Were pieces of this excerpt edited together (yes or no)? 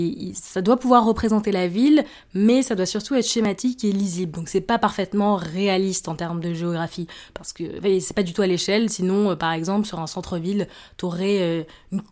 no